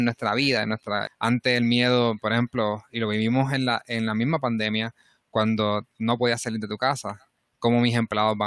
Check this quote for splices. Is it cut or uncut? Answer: cut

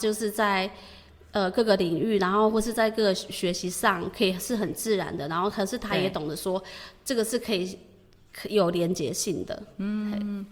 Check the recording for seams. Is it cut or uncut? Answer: uncut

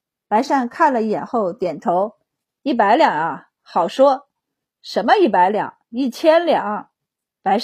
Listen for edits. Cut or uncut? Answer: uncut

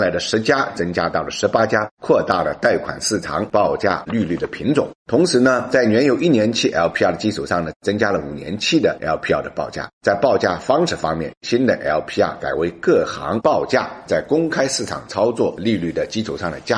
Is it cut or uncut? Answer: uncut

